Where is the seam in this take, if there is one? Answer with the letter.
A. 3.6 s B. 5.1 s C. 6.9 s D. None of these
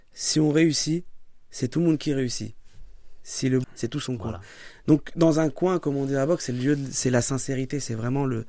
A